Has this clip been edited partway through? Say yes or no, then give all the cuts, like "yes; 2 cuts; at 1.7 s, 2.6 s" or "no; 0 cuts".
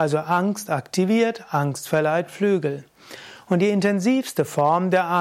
no; 0 cuts